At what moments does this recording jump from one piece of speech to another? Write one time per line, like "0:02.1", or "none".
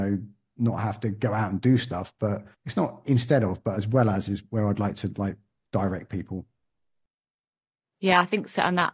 0:02.5